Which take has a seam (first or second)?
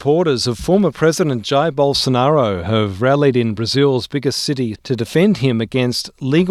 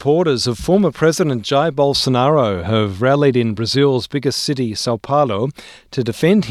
first